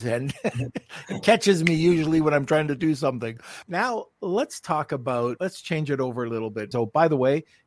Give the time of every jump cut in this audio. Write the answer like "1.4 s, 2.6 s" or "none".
3.6 s, 5.4 s, 6.7 s